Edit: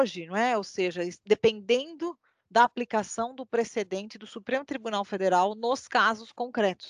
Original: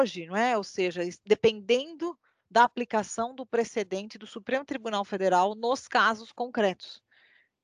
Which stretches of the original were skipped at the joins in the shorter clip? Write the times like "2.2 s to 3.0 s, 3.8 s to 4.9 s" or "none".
none